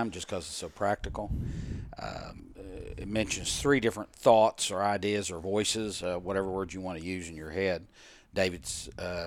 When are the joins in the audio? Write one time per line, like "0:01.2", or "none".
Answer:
none